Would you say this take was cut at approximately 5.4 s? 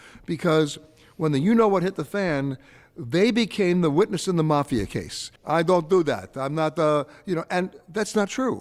yes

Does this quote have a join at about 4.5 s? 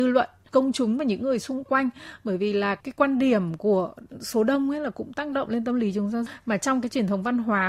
no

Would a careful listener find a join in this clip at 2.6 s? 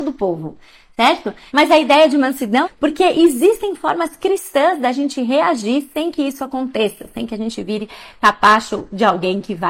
yes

